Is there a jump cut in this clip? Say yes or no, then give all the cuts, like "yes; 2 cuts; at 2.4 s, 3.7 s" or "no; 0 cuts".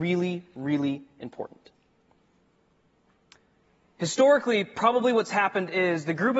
no; 0 cuts